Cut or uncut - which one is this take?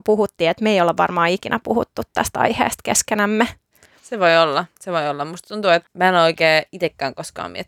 uncut